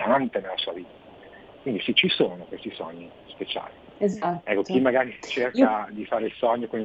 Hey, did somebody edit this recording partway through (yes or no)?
no